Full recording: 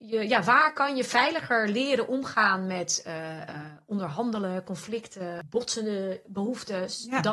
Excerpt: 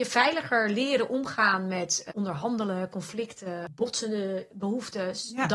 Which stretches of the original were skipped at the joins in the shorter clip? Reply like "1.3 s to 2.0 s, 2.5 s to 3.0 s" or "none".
3.1 s to 3.8 s